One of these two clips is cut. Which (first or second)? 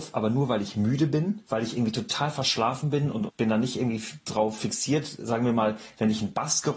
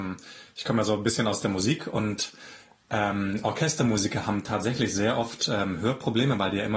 first